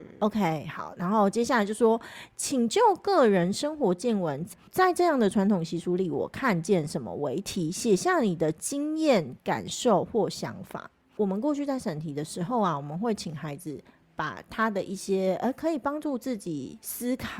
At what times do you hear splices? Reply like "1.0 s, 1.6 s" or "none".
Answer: none